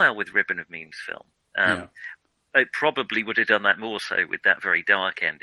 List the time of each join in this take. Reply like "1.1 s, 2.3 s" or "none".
none